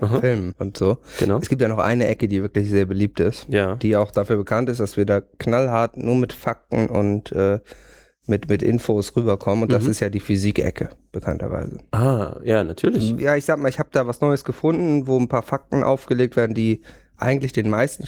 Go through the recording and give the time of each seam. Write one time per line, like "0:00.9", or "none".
none